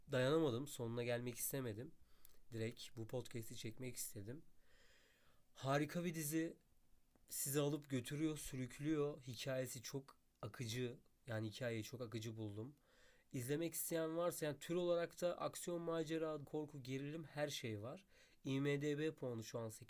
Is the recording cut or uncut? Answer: cut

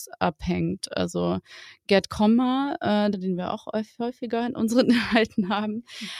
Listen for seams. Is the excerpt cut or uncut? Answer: cut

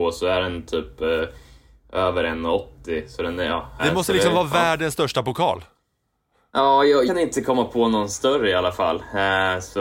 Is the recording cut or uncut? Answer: cut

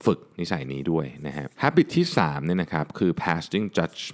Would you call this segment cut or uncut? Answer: cut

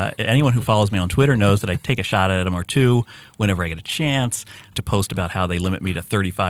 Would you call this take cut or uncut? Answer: cut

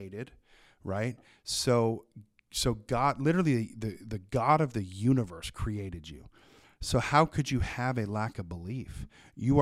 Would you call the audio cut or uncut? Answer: uncut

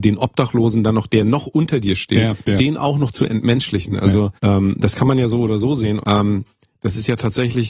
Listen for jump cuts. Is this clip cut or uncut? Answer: cut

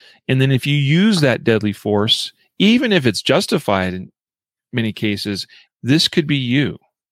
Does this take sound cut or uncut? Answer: cut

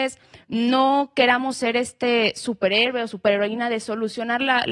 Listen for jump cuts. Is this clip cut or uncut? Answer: uncut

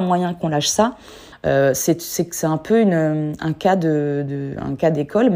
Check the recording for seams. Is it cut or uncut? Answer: cut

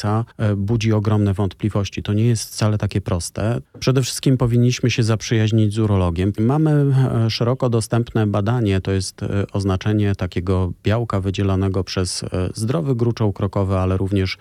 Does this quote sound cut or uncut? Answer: cut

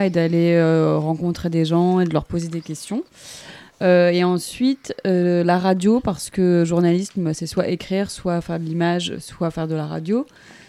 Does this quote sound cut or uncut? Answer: uncut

